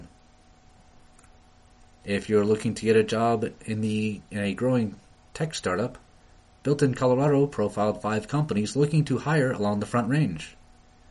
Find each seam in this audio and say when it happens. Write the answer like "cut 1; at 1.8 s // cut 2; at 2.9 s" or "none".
none